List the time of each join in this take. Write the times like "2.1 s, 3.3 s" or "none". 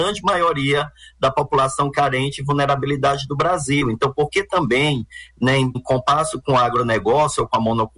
5.7 s